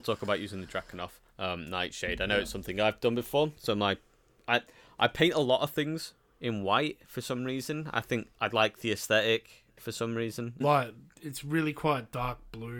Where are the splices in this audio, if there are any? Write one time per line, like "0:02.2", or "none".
0:10.6